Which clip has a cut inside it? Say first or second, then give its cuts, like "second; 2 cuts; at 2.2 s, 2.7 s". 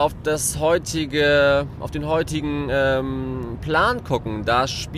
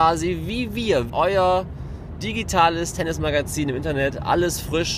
second; 1 cut; at 1.1 s